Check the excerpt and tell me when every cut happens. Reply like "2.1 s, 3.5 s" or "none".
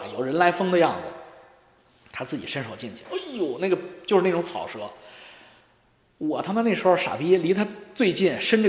3.0 s